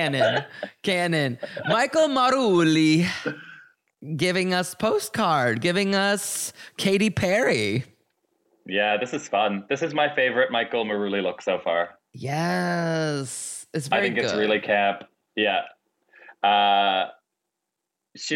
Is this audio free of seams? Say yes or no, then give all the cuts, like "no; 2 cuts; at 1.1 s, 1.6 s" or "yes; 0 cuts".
yes; 0 cuts